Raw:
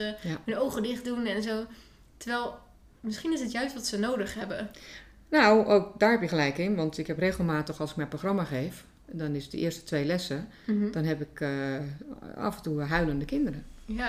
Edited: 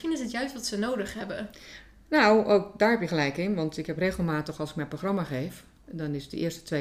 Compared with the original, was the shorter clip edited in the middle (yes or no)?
no